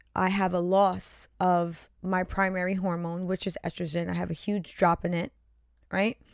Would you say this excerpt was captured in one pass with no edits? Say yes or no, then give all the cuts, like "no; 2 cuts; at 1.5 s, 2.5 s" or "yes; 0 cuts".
yes; 0 cuts